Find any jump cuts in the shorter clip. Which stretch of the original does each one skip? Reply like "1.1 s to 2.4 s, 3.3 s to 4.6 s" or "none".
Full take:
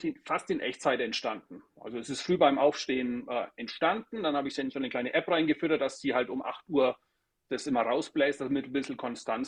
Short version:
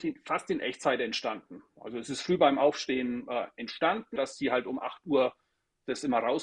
4.2 s to 5.8 s